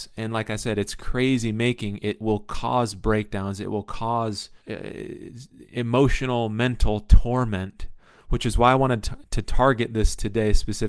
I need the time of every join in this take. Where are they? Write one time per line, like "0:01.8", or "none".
0:04.6